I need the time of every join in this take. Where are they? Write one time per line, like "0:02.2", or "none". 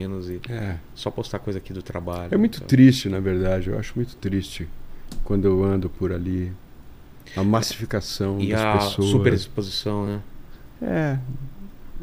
none